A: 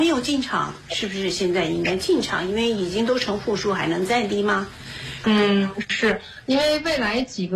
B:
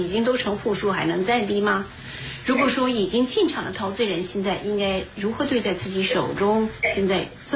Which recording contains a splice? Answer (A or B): A